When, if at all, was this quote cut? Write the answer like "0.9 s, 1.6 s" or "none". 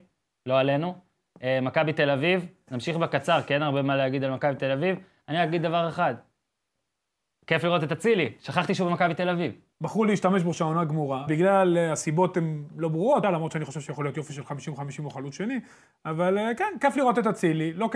9.7 s, 11.3 s, 13.2 s